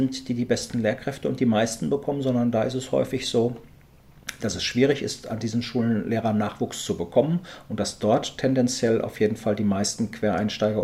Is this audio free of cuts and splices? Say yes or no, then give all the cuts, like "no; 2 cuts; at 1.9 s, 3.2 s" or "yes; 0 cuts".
yes; 0 cuts